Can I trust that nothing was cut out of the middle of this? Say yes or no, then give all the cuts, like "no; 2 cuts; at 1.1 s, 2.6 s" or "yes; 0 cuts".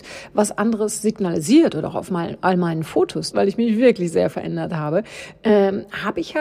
no; 1 cut; at 3.3 s